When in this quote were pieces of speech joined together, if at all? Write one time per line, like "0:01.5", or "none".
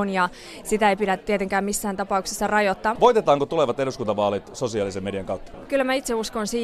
0:03.0